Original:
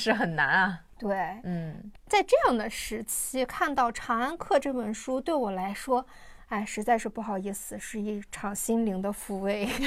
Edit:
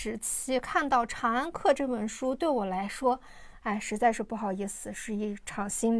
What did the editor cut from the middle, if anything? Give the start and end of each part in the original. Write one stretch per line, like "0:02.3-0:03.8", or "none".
none